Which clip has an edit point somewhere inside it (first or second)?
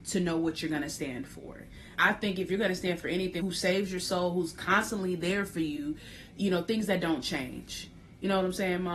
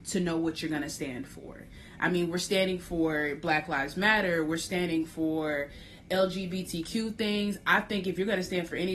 first